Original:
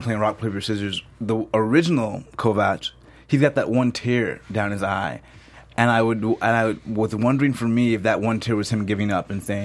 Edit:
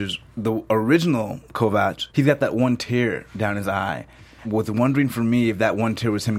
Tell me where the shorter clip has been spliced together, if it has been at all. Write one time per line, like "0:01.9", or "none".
0:02.1
0:04.4